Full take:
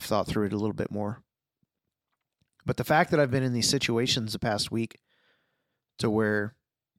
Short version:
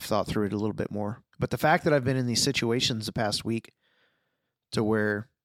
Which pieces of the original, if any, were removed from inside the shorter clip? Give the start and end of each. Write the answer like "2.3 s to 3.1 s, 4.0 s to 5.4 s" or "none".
1.3 s to 2.6 s